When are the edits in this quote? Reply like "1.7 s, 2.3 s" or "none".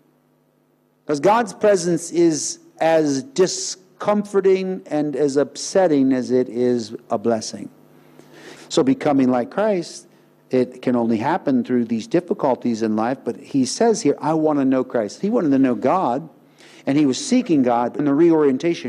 8.6 s, 15.2 s, 18.0 s